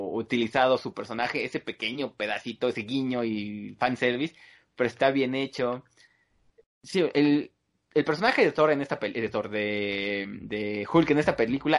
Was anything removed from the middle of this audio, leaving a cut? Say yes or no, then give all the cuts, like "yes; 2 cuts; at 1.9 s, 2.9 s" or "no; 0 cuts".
no; 0 cuts